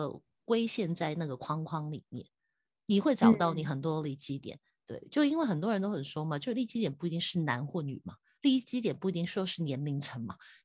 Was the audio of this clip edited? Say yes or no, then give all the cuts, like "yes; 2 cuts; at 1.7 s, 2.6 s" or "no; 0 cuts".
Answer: no; 0 cuts